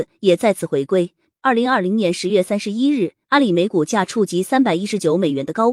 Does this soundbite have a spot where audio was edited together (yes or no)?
yes